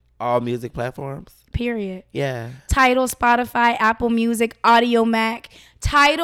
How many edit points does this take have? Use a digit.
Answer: 0